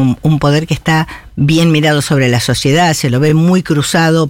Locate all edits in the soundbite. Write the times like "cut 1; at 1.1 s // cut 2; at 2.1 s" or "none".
none